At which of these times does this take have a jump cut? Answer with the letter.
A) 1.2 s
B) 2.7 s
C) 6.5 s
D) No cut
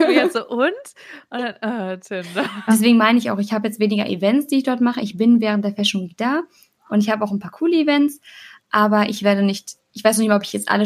B